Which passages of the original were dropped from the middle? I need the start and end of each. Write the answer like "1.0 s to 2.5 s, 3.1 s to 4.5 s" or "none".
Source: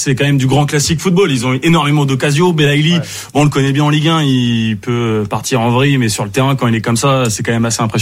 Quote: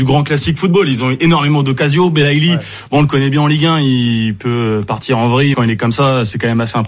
6.0 s to 6.6 s